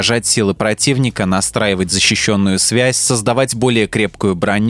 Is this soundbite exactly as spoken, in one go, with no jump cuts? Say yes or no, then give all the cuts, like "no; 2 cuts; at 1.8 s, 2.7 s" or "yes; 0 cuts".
yes; 0 cuts